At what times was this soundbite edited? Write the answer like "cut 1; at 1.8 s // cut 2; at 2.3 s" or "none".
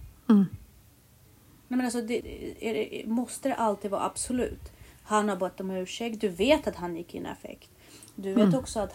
cut 1; at 2.2 s